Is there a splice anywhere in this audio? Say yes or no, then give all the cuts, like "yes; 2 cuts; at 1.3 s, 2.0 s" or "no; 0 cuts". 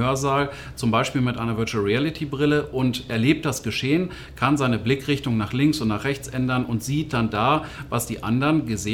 no; 0 cuts